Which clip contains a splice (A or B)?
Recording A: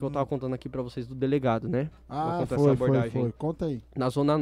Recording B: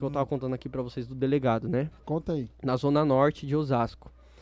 B